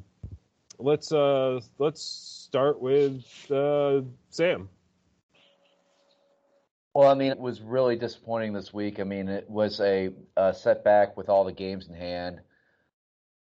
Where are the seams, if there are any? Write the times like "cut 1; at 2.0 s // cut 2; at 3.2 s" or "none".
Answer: cut 1; at 7.3 s